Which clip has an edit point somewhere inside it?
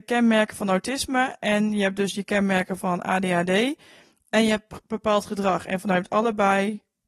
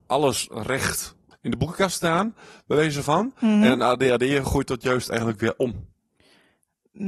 second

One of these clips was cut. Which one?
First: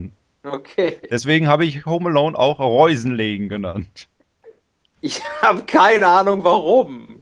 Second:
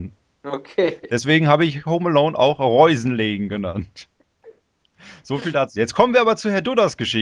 first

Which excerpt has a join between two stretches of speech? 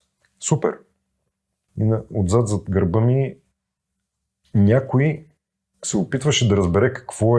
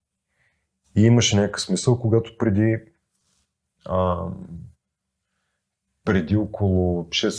first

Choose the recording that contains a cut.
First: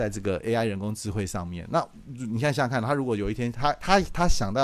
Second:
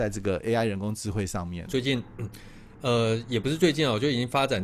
second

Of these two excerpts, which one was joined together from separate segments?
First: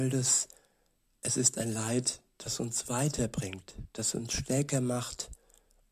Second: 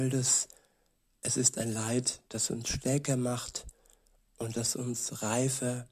second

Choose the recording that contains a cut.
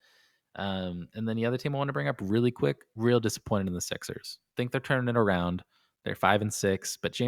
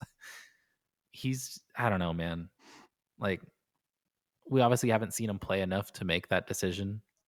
second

